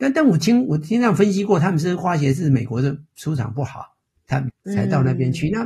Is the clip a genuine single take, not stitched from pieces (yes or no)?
no